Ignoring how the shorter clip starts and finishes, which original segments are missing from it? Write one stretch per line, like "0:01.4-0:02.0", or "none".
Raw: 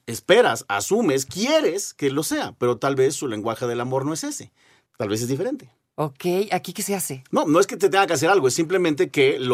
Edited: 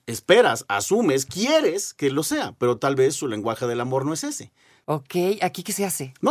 0:04.8-0:05.9